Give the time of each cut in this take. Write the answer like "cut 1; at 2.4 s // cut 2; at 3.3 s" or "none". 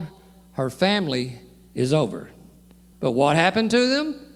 cut 1; at 2.9 s